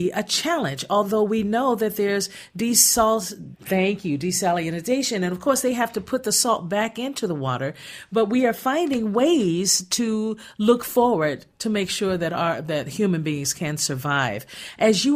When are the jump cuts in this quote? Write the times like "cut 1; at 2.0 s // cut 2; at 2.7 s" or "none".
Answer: cut 1; at 3.5 s

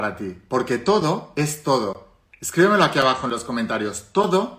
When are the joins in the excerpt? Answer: none

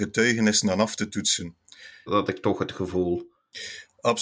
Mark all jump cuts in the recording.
cut 1; at 2.1 s

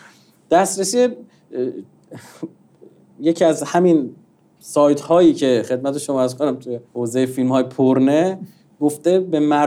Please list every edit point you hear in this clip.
cut 1; at 6.9 s

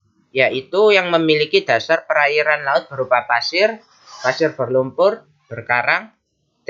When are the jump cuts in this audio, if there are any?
none

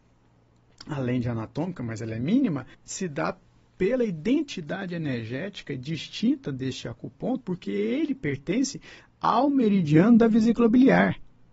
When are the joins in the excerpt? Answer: cut 1; at 2.7 s // cut 2; at 7.4 s

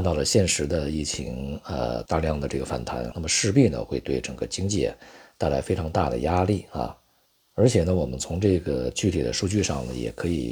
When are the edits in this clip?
cut 1; at 2.1 s // cut 2; at 3.1 s

